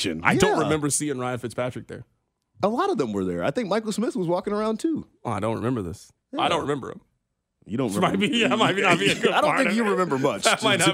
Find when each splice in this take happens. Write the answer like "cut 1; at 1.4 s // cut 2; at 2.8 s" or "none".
cut 1; at 6.2 s